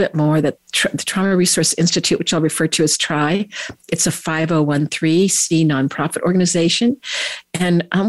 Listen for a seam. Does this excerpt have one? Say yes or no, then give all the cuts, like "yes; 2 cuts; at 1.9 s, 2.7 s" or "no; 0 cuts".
no; 0 cuts